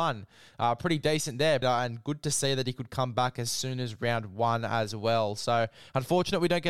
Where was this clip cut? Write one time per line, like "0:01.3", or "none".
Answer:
0:01.6